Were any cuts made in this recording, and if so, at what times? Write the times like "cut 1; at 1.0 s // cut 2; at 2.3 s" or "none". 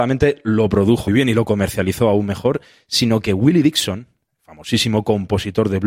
cut 1; at 1.1 s